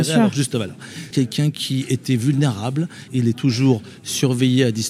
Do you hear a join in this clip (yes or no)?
yes